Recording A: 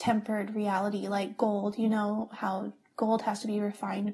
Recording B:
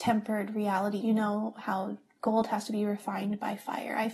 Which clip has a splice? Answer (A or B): B